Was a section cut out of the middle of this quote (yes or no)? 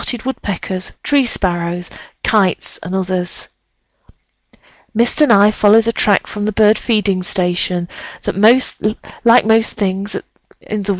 yes